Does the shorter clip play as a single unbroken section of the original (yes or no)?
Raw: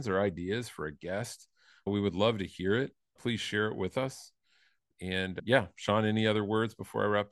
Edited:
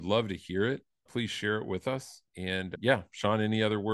no